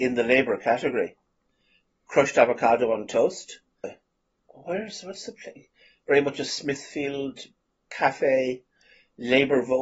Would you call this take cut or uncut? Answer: cut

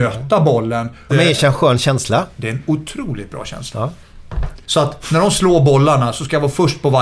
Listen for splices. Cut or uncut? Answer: cut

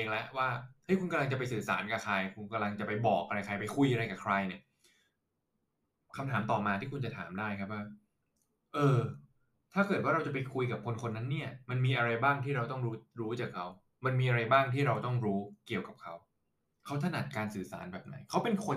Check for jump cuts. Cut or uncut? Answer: uncut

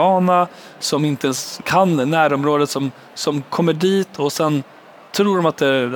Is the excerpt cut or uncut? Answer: uncut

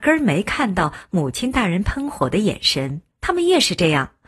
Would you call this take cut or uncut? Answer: cut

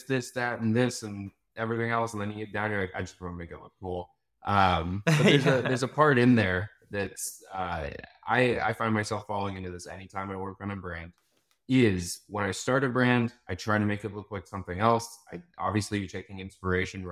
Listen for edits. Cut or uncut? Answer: uncut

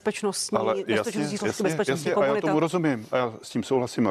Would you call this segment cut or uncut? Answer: uncut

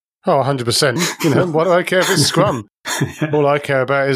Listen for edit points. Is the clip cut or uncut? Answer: cut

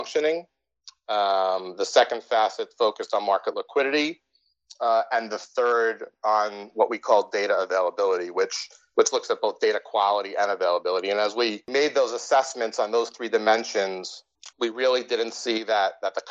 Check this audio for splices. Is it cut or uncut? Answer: cut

